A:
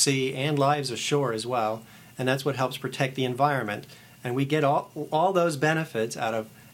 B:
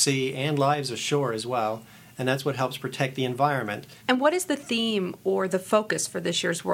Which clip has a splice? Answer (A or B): B